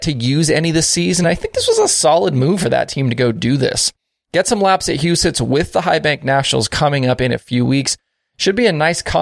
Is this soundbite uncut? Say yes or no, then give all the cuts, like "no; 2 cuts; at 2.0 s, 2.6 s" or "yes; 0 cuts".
yes; 0 cuts